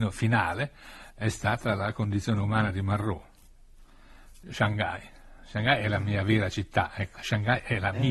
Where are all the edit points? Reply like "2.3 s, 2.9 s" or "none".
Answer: 7.2 s